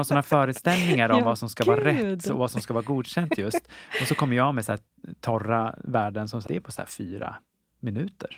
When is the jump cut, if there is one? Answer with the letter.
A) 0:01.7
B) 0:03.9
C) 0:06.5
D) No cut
C